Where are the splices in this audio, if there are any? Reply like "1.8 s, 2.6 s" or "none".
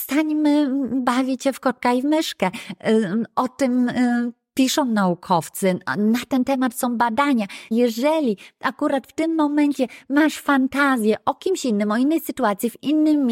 7.7 s